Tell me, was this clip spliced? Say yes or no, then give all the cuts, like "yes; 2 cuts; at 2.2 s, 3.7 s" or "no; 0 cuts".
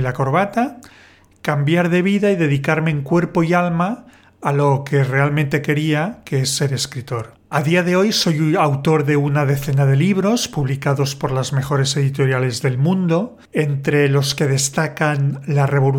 no; 0 cuts